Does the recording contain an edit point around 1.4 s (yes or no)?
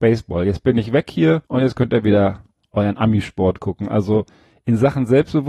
yes